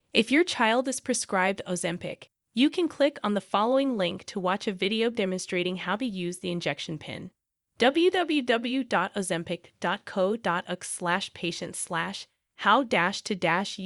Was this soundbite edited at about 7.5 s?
no; 0 cuts

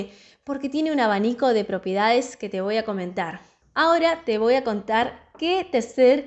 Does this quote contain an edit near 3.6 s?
yes; 1 cut; at 3.6 s

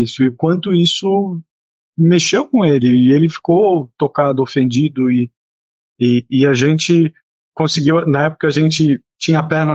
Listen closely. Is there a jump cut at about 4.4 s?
no; 0 cuts

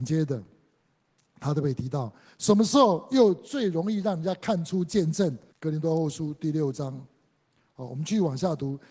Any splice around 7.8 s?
no; 2 cuts; at 2.2 s, 5.5 s

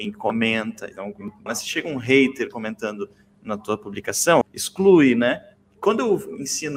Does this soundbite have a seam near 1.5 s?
yes; 2 cuts; at 1.5 s, 4.4 s

